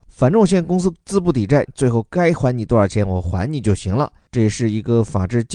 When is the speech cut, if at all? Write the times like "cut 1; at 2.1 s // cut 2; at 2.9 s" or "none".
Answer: cut 1; at 1.7 s